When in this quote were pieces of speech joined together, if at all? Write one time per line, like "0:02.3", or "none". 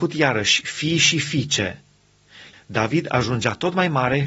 0:02.5